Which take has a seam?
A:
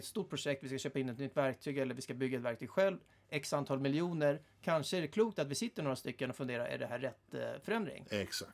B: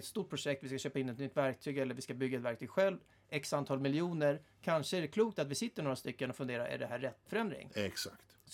B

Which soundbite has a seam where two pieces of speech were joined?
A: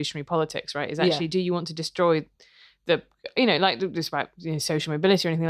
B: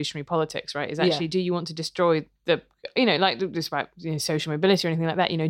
B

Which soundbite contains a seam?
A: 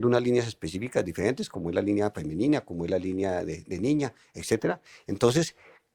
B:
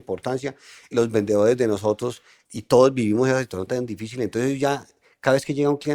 B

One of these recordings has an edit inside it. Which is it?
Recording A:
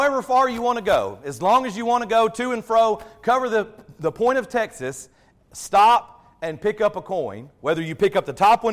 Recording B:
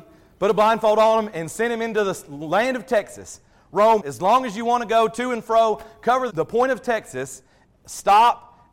B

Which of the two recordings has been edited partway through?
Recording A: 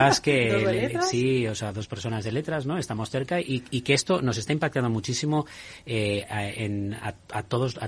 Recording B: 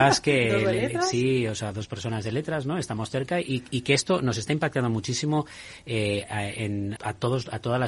B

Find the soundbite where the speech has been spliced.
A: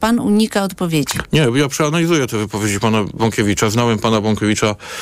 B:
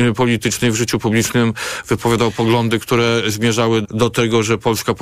B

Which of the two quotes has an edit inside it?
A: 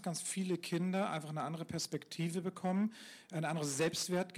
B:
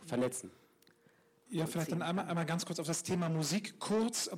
B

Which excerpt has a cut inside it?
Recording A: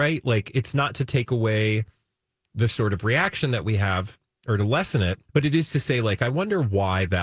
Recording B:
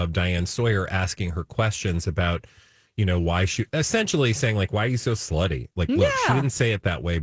A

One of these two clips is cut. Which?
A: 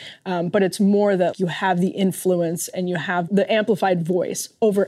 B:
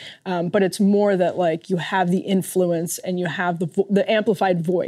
A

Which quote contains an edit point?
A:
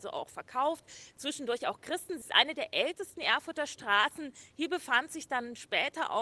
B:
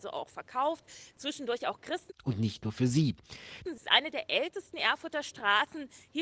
B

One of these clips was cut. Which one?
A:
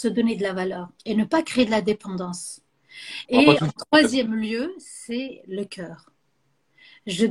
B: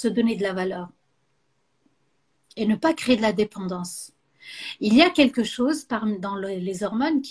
A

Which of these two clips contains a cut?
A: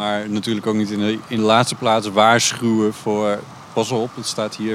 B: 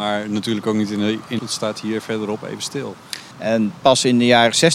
B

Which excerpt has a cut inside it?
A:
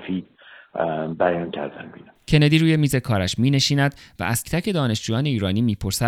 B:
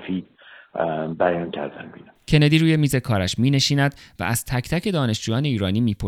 A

